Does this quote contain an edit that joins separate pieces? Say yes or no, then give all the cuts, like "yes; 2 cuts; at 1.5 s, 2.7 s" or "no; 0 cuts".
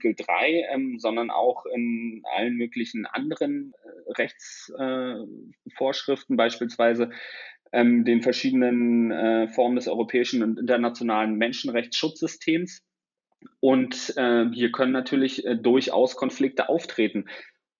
no; 0 cuts